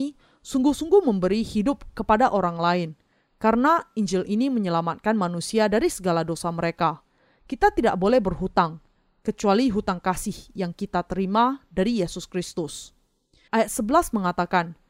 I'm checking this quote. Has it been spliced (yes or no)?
yes